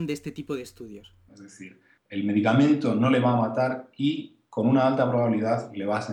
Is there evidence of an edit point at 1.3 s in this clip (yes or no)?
yes